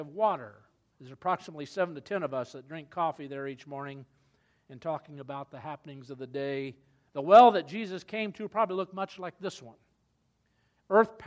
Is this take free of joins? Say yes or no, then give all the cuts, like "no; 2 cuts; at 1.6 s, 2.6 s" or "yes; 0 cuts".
no; 2 cuts; at 0.9 s, 7.1 s